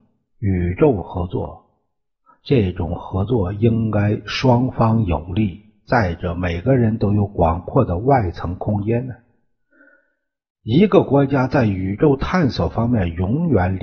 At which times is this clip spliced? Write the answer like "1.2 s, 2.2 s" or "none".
none